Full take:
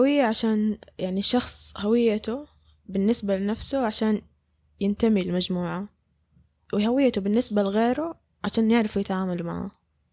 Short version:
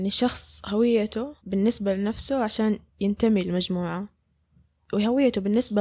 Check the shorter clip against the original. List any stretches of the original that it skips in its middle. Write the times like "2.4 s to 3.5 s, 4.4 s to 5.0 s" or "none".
2.5 s to 2.8 s, 4.3 s to 4.7 s